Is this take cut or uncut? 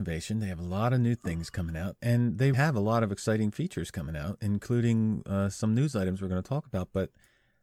cut